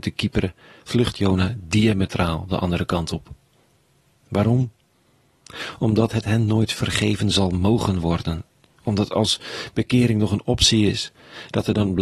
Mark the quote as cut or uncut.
uncut